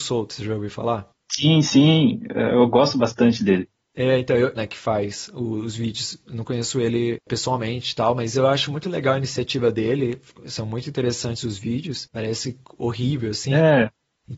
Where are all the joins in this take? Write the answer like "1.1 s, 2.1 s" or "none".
4.6 s, 12.1 s